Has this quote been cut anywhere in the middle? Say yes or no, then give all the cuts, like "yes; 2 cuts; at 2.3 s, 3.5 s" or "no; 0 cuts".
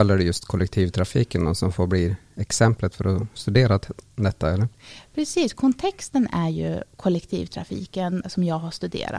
yes; 1 cut; at 8.2 s